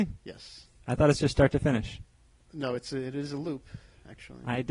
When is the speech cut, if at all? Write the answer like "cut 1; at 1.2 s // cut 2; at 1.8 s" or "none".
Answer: none